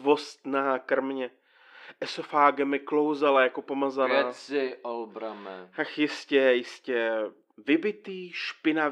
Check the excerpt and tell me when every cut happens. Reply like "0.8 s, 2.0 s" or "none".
7.5 s